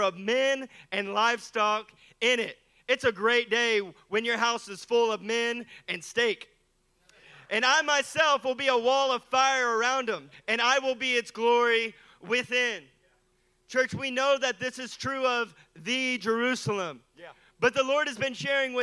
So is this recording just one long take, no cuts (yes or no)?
no